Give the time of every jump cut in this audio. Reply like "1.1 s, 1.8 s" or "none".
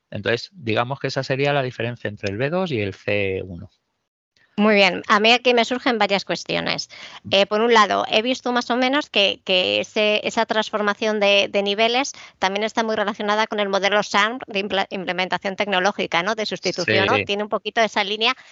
17.1 s